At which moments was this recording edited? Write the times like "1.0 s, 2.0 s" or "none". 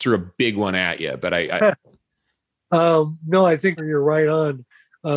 3.8 s